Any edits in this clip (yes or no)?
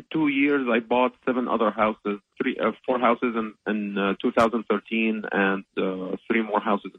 yes